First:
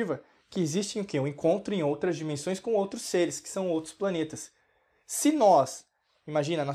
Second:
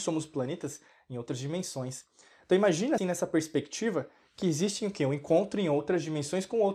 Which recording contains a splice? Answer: second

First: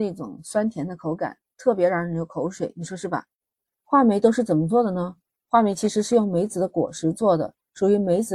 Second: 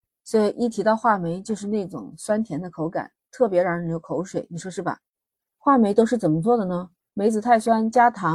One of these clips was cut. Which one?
second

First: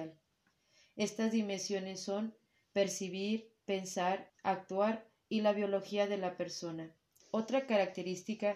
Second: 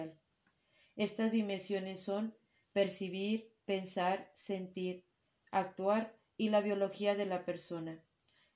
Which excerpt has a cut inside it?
first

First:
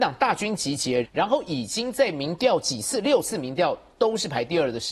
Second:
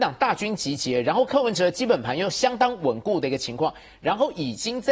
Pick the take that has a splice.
first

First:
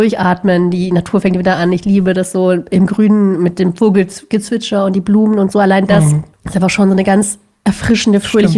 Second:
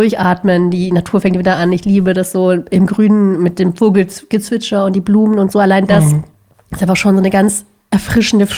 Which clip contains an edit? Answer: first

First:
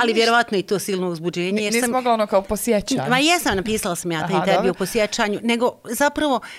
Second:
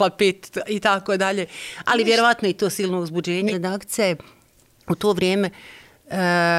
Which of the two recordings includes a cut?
second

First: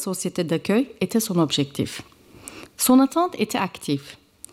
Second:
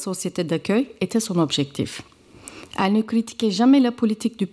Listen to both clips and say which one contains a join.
first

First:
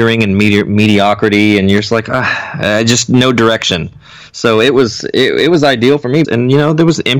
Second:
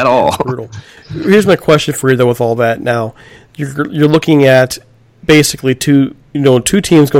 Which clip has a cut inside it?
first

